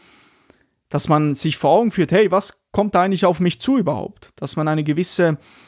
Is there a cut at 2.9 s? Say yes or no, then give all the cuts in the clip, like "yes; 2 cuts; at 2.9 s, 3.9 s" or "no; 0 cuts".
no; 0 cuts